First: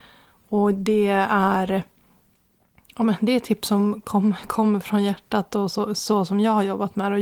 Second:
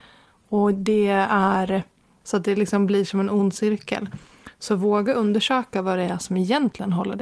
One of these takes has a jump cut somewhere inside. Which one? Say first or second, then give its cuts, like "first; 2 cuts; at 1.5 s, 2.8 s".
second; 1 cut; at 2.2 s